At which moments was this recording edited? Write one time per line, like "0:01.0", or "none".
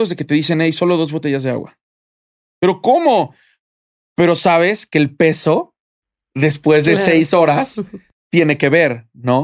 none